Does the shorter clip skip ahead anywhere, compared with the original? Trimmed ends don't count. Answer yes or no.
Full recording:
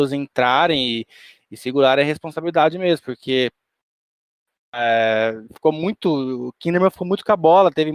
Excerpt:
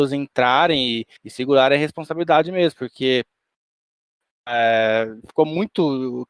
yes